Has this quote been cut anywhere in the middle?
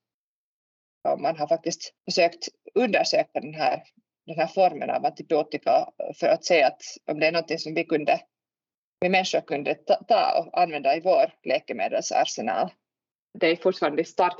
no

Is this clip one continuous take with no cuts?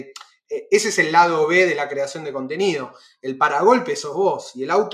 yes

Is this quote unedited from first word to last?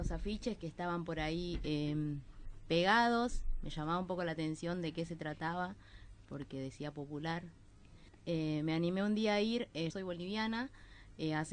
no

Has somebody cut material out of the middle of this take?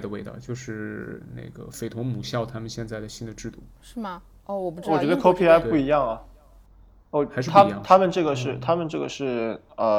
no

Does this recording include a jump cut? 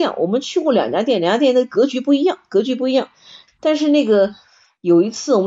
yes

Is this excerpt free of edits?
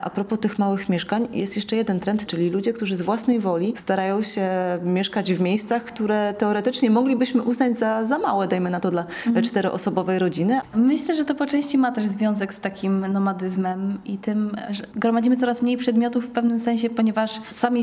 no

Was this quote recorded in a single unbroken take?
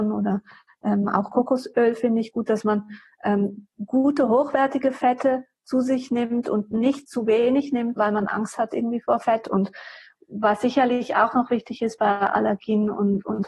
no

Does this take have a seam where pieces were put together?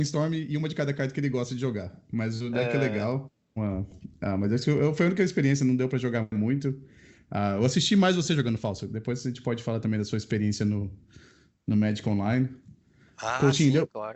yes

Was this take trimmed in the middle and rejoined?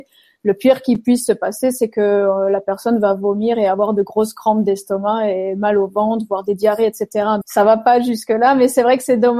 yes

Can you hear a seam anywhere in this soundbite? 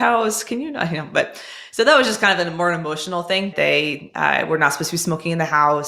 yes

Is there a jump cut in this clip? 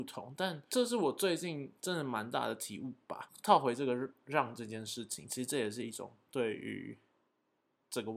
no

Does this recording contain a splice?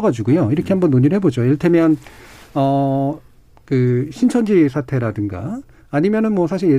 no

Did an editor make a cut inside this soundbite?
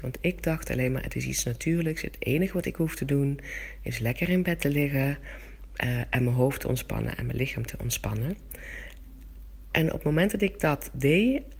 no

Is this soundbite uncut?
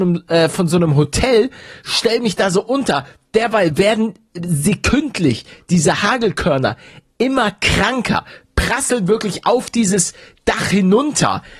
yes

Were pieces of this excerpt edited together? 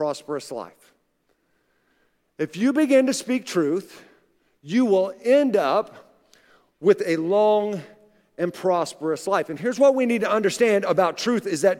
no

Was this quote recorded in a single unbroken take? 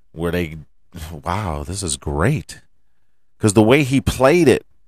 yes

